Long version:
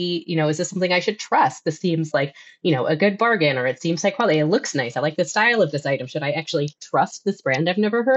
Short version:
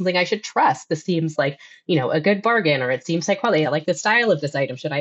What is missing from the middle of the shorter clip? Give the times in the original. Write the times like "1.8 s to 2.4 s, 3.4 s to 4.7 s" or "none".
4.4 s to 4.9 s